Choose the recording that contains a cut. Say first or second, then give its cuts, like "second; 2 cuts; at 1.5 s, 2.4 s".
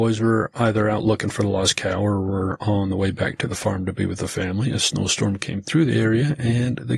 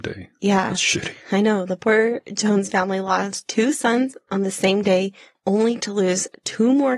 second; 1 cut; at 5.4 s